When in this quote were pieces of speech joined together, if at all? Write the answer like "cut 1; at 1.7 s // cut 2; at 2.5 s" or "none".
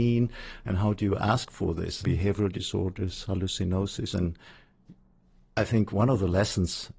cut 1; at 2.0 s // cut 2; at 4.1 s